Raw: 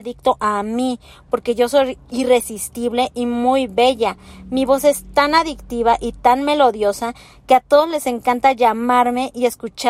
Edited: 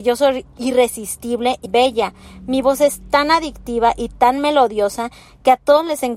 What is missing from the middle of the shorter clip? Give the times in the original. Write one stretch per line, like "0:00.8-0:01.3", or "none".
0:03.2-0:03.7